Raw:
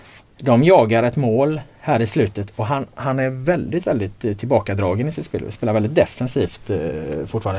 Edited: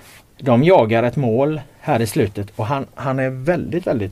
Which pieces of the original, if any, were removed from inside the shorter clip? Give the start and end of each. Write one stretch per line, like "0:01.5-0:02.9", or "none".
none